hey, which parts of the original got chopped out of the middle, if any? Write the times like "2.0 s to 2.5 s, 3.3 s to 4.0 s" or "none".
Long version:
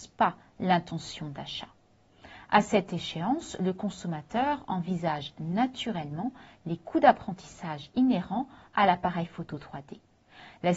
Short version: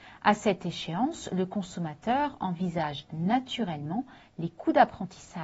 none